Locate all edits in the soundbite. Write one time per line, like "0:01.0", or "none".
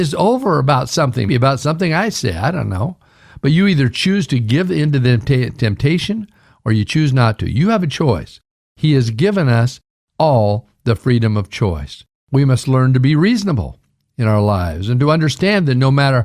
0:01.3